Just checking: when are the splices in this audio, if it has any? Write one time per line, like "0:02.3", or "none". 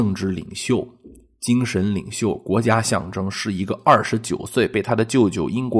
none